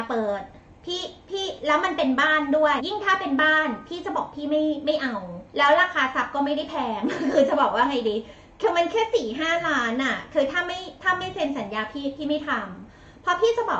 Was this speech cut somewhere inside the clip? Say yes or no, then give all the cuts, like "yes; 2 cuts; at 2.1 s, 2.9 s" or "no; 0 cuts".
yes; 2 cuts; at 2.8 s, 5.5 s